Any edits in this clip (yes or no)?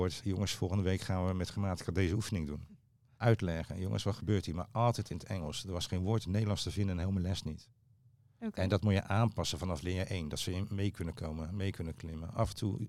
yes